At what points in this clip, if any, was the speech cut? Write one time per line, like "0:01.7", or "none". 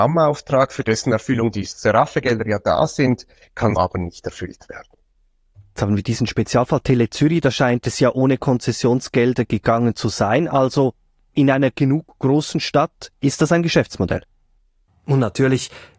0:03.8
0:14.9